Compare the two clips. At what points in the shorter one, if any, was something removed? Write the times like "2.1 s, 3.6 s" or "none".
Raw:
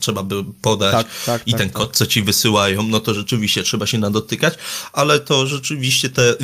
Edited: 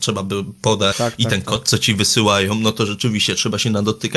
0.9 s